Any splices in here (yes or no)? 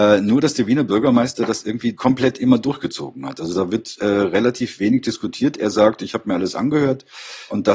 no